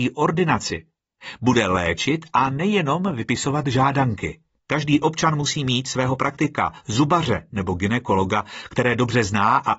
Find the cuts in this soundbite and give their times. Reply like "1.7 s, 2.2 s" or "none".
4.6 s